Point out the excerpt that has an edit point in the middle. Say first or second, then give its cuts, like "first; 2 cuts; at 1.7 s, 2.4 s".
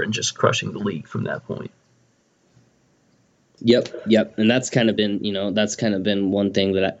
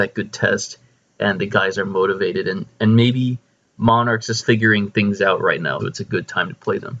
second; 2 cuts; at 4.4 s, 5.8 s